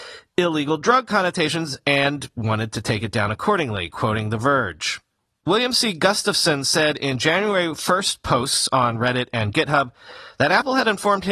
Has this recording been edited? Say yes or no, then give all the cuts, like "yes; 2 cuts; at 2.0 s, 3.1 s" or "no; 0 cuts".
no; 0 cuts